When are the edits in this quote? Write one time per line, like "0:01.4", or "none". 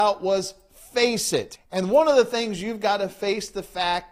0:01.6